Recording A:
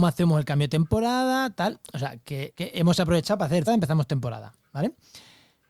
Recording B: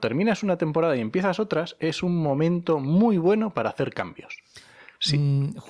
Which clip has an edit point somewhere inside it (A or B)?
A